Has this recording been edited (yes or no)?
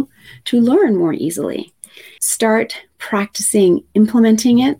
yes